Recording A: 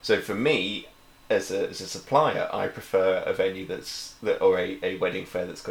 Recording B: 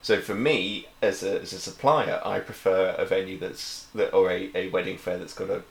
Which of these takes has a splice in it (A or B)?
B